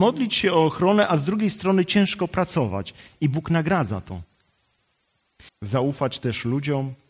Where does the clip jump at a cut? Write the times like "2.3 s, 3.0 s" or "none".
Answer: 5.5 s